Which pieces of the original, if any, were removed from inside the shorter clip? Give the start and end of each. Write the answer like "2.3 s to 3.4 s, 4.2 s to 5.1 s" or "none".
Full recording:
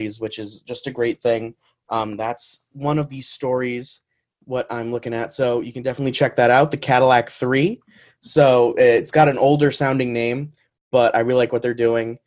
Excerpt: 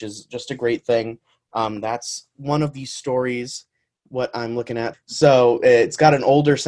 5.3 s to 8.1 s